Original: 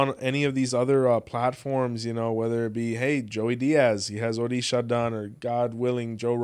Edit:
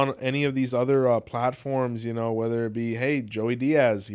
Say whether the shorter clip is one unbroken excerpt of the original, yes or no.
yes